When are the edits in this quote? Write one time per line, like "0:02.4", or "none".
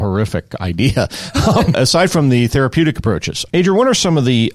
0:01.7
0:03.5